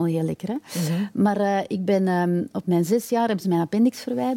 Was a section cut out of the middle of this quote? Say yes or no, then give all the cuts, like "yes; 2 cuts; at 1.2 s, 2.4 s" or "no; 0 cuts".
no; 0 cuts